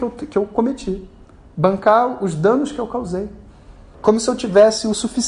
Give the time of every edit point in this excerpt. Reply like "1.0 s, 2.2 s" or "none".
3.9 s